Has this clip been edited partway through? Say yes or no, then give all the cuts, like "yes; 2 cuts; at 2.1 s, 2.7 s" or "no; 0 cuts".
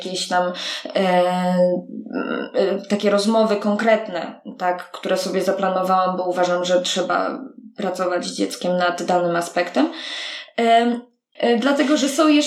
yes; 1 cut; at 11.3 s